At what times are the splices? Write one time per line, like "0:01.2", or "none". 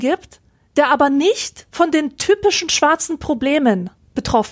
none